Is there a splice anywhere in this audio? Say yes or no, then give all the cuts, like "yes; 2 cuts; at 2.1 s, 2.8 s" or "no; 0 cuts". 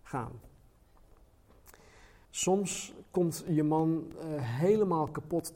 yes; 1 cut; at 2.2 s